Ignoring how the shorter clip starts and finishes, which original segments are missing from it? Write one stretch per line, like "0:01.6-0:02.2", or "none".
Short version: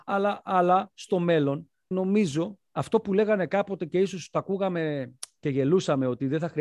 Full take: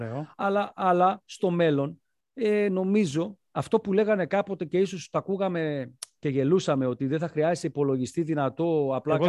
0:02.2-0:02.7